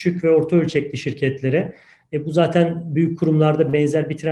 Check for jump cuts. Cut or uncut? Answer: uncut